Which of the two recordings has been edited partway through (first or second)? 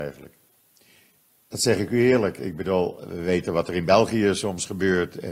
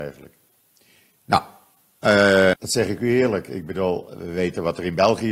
second